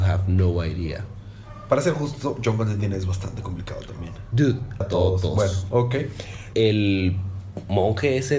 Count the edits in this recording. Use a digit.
2